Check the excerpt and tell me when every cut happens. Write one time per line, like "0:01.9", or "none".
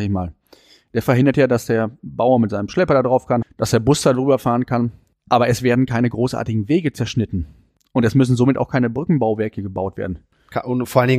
0:03.4